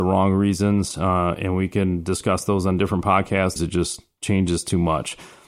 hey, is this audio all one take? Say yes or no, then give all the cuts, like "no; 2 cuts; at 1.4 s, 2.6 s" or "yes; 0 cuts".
no; 1 cut; at 3.6 s